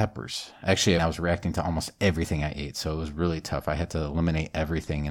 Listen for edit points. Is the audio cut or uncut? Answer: cut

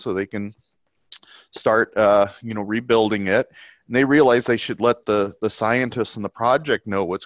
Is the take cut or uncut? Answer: uncut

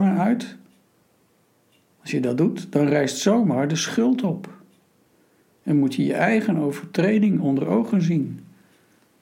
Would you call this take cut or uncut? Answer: uncut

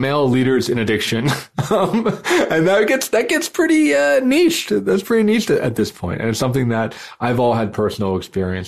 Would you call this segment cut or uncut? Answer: uncut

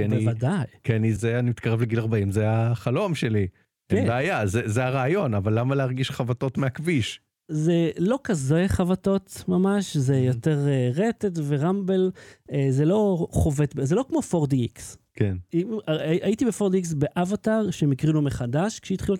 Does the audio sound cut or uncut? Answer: cut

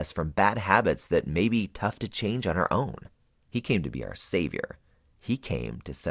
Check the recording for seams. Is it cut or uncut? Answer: cut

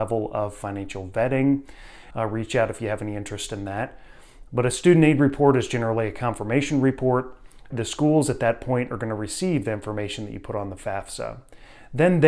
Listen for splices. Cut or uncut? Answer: cut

